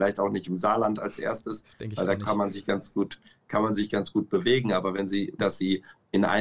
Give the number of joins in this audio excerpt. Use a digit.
1